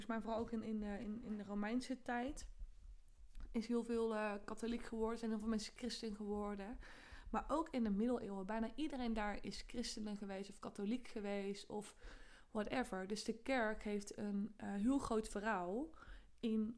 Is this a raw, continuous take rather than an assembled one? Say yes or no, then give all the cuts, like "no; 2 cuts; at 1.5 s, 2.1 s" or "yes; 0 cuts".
yes; 0 cuts